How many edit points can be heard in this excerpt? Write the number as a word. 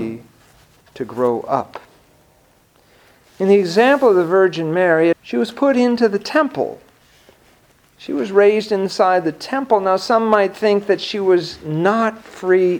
one